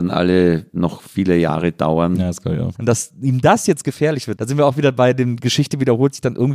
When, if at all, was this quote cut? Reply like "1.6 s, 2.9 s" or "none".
2.7 s, 4.4 s